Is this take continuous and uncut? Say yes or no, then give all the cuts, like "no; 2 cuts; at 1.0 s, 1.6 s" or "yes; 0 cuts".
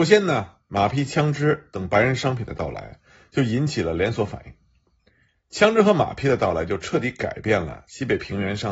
yes; 0 cuts